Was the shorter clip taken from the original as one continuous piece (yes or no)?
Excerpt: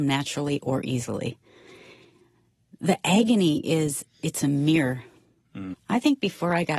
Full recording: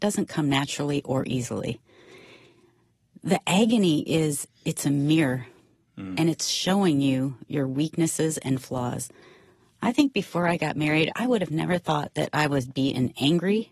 no